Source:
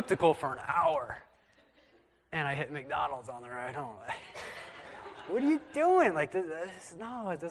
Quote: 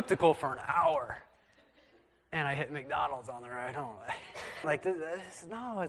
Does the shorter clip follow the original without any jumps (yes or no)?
no